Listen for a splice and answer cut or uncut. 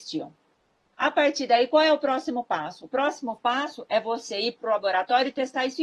uncut